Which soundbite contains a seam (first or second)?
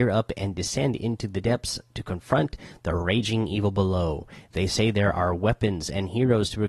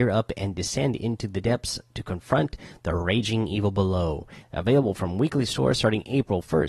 second